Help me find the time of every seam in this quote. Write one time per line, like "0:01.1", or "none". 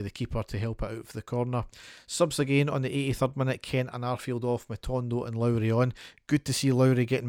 none